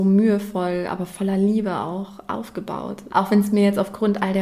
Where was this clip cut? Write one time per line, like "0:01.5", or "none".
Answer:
0:03.1